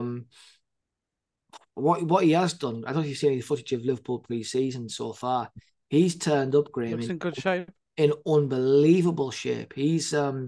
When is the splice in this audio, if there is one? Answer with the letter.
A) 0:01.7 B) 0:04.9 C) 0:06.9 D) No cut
D